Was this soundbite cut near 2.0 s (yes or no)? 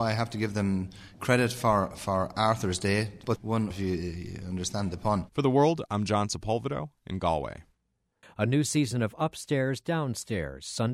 no